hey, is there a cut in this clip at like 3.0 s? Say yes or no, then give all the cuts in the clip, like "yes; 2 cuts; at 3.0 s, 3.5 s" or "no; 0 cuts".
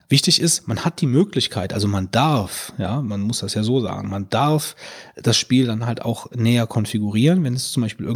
no; 0 cuts